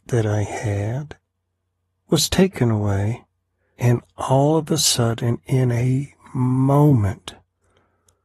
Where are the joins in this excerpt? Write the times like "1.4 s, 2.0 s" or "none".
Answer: 3.8 s